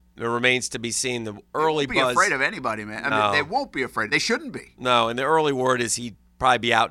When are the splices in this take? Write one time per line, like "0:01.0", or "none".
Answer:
none